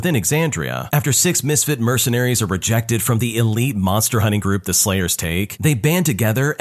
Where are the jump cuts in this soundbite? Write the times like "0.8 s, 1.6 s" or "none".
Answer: none